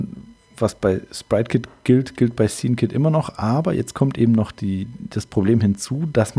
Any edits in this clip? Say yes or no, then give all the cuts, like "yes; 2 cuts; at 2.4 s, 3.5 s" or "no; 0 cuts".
no; 0 cuts